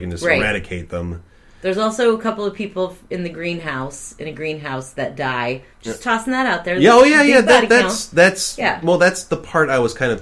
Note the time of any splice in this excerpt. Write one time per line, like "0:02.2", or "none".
none